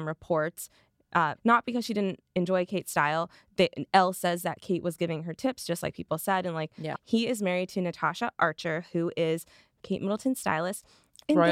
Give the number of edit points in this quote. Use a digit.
2